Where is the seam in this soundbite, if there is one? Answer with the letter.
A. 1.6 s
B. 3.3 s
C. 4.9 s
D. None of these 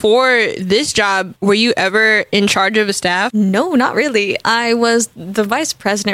D